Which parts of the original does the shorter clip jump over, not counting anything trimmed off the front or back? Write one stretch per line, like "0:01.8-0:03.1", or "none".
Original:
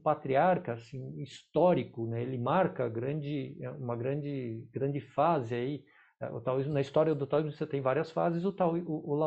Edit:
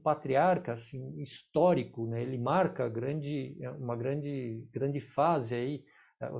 none